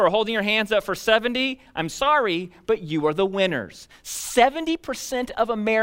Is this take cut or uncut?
uncut